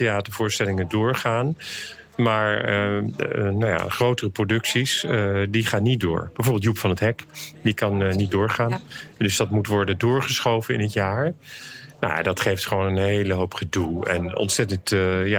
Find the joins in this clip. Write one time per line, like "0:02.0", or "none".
none